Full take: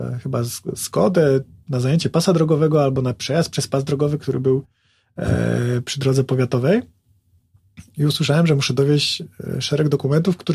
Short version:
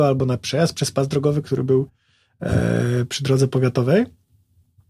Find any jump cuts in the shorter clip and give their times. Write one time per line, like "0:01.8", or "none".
none